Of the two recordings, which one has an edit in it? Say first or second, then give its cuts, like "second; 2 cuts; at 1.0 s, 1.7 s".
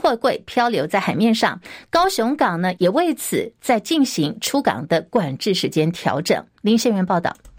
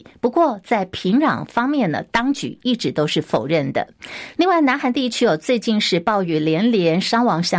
first; 1 cut; at 2.8 s